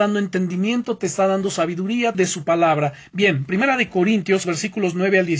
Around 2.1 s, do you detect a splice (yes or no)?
yes